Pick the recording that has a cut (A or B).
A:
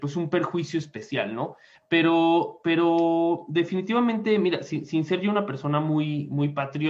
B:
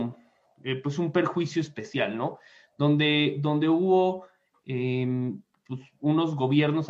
A